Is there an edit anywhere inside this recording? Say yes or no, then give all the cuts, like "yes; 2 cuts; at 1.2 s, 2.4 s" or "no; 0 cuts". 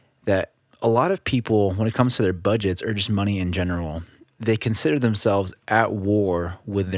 no; 0 cuts